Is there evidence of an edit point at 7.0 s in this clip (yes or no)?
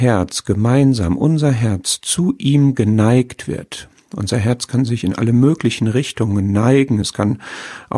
yes